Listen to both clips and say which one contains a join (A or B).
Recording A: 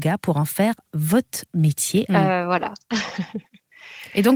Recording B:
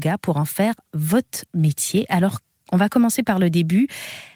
A